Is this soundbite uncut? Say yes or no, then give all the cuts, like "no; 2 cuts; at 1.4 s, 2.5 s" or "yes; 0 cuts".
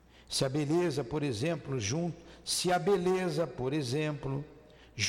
yes; 0 cuts